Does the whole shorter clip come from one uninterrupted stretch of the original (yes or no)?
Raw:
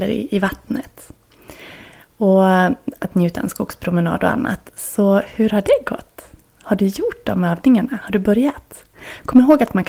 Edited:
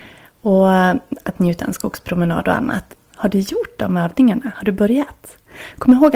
no